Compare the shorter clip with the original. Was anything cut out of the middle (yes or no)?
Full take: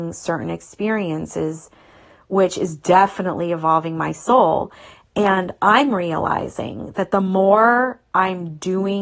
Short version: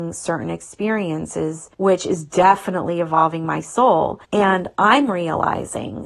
yes